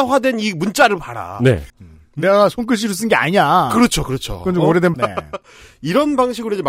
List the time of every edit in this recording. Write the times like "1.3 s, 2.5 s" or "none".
1.7 s, 4.9 s